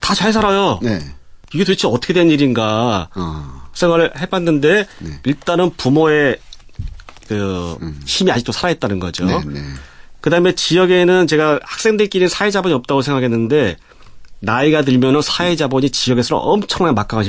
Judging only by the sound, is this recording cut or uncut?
uncut